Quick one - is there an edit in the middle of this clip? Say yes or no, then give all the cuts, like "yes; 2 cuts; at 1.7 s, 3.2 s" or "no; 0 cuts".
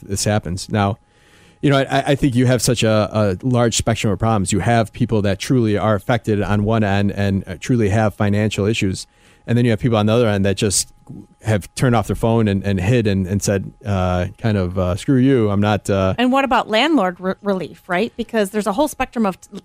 no; 0 cuts